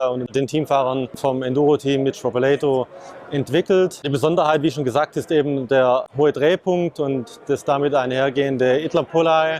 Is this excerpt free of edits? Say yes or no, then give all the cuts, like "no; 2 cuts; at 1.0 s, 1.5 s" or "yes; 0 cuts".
yes; 0 cuts